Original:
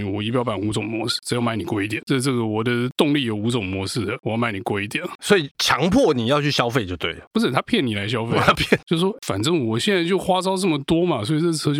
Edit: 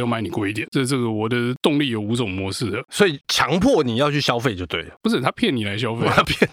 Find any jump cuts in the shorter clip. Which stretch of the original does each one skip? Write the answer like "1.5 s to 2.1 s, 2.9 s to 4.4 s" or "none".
4.2 s to 5.2 s